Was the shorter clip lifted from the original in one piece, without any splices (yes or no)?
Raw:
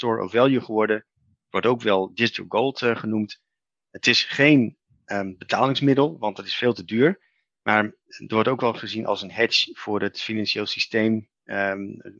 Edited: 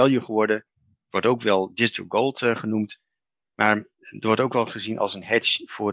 no